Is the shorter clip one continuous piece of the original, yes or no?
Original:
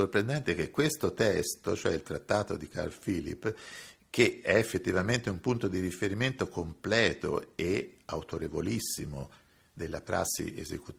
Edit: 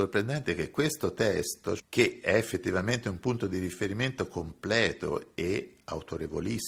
no